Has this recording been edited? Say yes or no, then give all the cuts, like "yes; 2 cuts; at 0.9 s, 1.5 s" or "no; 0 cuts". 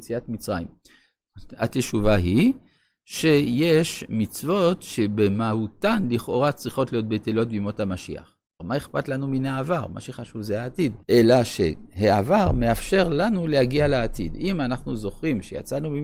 yes; 2 cuts; at 8.6 s, 11.0 s